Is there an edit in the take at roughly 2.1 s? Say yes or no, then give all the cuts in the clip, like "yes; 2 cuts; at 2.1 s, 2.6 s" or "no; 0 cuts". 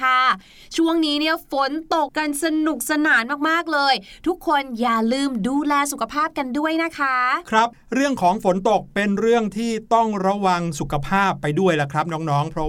yes; 1 cut; at 2.1 s